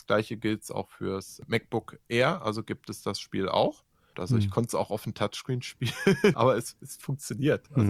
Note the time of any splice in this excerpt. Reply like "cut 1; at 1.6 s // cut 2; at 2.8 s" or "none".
cut 1; at 4.1 s // cut 2; at 6.3 s